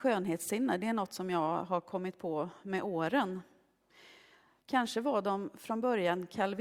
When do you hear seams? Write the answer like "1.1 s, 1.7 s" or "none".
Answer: 4.6 s